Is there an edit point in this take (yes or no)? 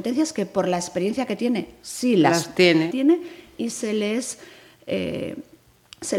yes